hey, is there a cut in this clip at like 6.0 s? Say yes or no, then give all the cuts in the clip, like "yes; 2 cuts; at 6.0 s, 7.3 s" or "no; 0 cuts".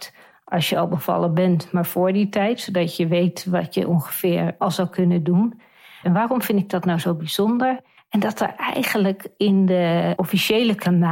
yes; 2 cuts; at 6.0 s, 8.0 s